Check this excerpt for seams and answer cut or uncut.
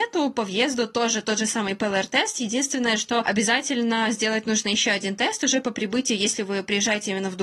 uncut